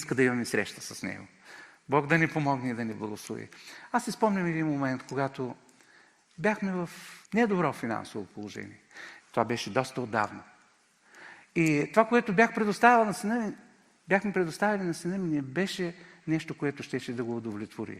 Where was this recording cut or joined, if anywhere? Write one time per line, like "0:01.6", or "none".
0:07.2
0:09.2